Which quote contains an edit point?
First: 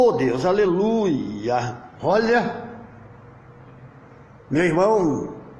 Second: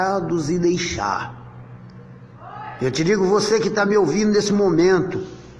first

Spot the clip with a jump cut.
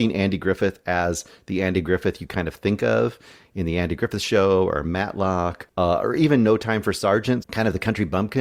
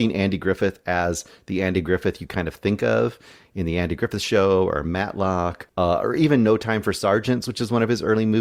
first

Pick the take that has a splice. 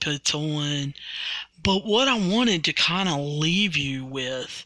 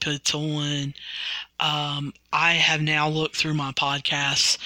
first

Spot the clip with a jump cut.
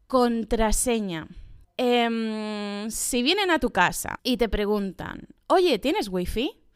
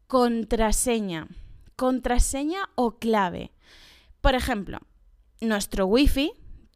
first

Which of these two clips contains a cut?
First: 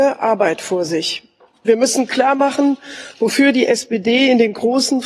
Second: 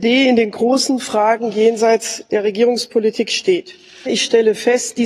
second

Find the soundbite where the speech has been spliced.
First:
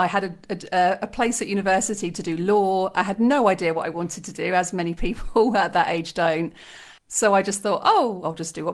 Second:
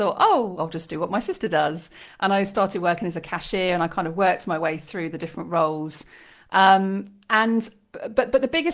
first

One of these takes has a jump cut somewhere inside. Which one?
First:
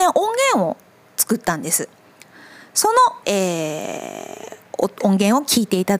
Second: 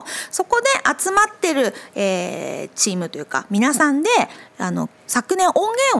first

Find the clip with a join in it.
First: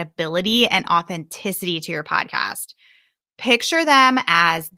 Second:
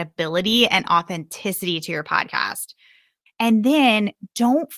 second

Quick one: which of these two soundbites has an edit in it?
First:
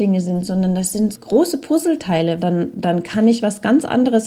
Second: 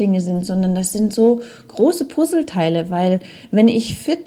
first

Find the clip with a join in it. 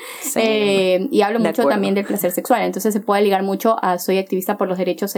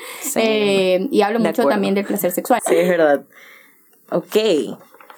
second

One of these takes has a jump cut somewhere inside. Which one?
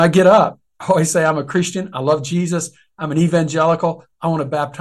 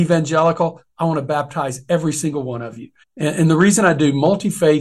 second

